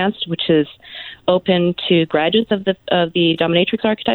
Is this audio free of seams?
yes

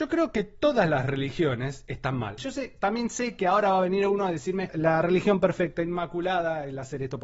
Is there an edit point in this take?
yes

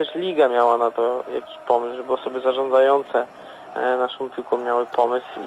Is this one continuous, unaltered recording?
yes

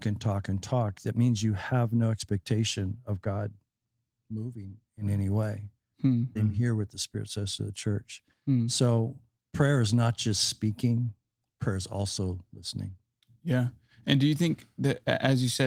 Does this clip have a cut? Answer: yes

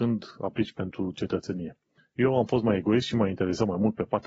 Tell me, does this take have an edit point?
yes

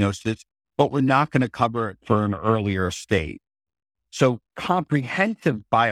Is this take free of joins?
yes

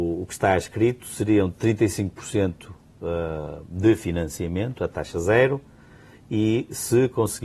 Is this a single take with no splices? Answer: yes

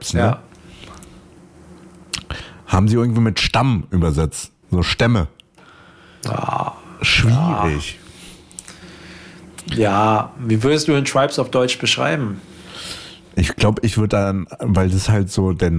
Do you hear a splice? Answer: no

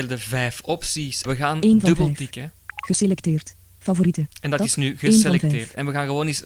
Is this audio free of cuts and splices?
no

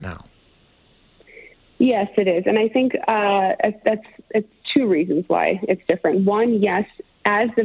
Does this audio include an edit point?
no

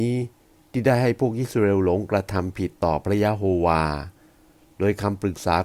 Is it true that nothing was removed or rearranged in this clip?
yes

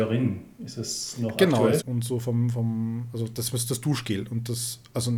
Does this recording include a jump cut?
yes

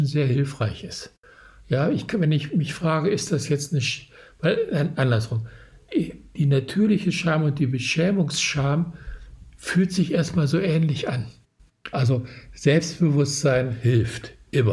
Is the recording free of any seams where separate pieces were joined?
no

